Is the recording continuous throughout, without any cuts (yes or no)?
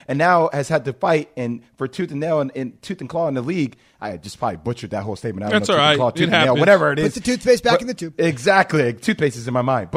yes